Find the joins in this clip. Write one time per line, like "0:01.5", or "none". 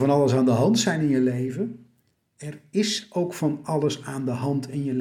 none